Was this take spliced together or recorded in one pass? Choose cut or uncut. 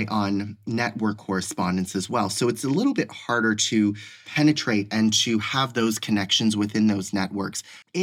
uncut